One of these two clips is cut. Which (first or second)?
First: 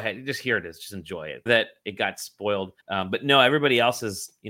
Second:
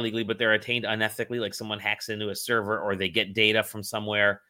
first